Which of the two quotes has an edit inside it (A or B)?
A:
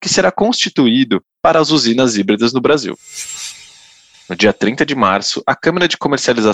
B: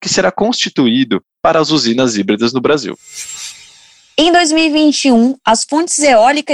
A